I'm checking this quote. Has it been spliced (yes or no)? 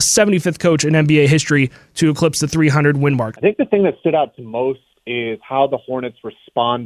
yes